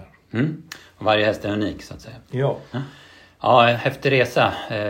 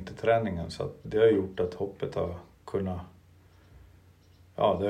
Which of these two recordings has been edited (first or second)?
second